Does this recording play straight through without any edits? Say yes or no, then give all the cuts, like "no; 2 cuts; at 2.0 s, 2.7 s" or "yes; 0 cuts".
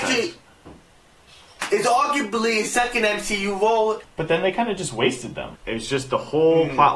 no; 2 cuts; at 4.0 s, 5.5 s